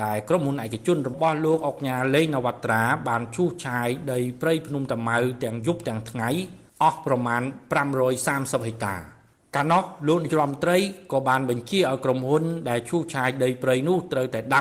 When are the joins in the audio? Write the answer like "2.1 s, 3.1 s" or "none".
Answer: none